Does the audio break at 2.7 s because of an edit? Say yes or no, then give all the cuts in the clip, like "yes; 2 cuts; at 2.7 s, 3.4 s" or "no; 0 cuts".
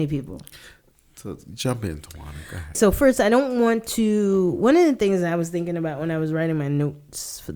yes; 1 cut; at 2.7 s